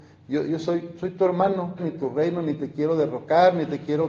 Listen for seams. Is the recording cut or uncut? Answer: cut